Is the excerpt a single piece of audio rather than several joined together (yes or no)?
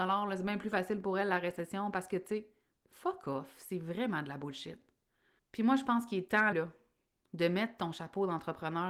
no